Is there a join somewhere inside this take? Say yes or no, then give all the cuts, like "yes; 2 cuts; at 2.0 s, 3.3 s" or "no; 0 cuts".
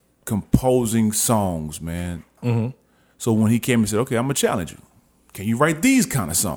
yes; 1 cut; at 2.4 s